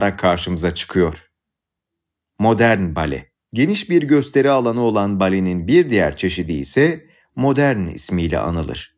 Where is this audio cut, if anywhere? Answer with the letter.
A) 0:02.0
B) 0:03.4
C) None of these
B